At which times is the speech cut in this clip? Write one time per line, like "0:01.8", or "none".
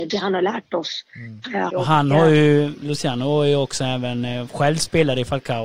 0:01.7
0:02.8